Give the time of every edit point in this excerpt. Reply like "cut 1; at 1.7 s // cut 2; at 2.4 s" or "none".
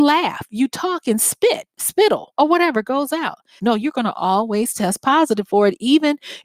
cut 1; at 3.6 s